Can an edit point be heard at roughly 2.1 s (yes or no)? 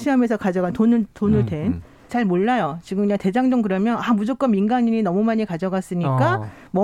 yes